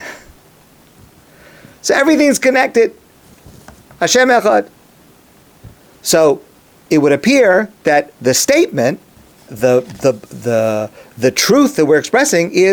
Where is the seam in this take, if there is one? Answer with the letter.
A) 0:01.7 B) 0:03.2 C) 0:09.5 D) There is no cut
C